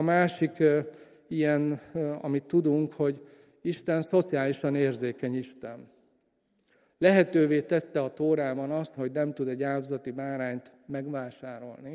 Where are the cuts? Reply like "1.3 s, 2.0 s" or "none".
9.0 s

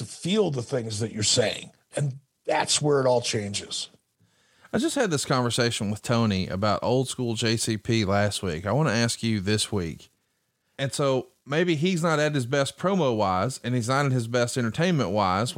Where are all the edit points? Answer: 1.9 s, 10.7 s

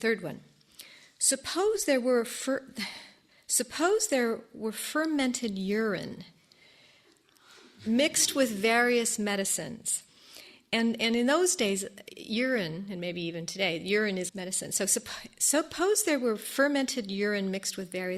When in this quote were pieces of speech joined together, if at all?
14.3 s

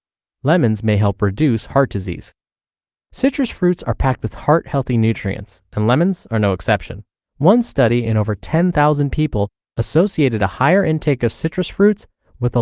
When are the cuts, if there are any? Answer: 7.2 s

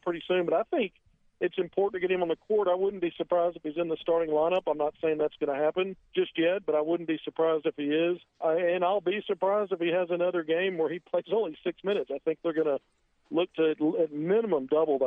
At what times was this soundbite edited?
6.1 s, 8.3 s

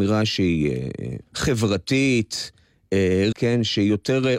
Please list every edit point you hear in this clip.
1.3 s, 3.3 s

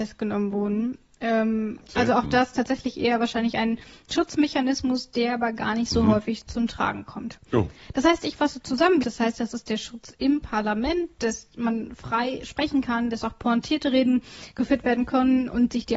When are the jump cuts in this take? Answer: 9.0 s

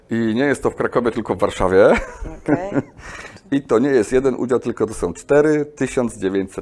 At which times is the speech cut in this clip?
none

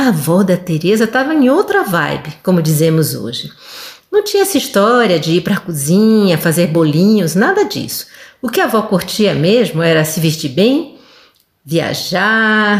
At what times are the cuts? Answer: none

